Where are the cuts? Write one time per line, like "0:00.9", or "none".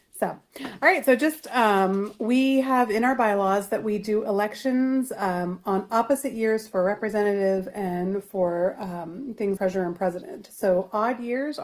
0:09.6